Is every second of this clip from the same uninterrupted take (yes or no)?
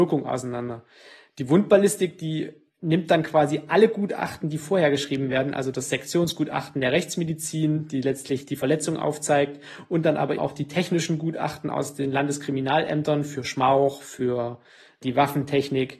no